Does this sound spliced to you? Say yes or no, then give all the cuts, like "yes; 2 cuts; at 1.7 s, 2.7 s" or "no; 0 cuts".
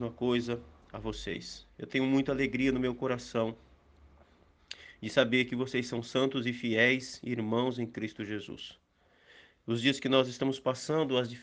no; 0 cuts